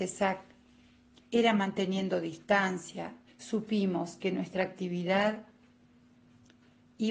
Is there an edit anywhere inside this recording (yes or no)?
yes